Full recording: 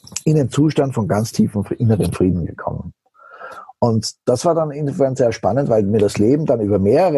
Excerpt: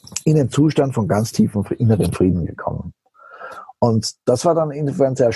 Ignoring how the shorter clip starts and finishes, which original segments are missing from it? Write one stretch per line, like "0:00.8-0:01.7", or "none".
none